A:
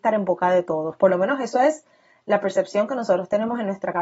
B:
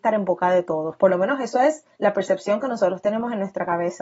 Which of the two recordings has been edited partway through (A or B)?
B